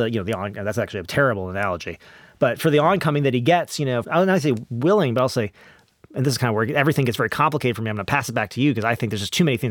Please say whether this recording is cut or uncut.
cut